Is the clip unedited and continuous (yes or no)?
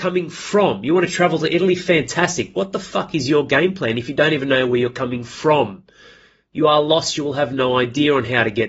yes